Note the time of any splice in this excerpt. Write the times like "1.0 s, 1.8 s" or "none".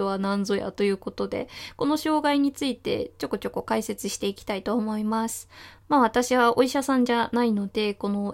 none